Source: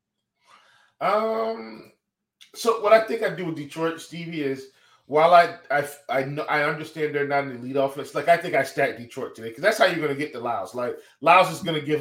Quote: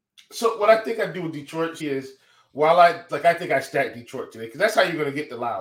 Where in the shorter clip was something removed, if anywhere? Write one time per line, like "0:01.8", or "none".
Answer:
0:01.8
0:03.1

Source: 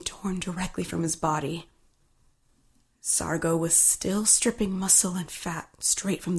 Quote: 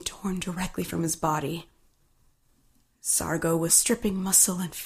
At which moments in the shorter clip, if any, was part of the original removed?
0:03.7

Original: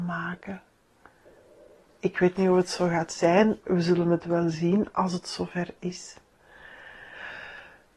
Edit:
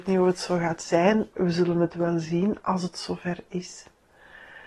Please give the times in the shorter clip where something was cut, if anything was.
none

